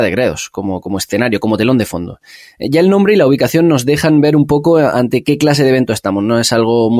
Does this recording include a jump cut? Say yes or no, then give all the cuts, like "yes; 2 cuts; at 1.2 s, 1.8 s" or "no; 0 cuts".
no; 0 cuts